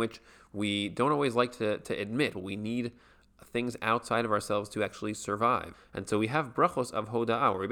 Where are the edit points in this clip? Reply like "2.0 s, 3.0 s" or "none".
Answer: 2.3 s, 5.7 s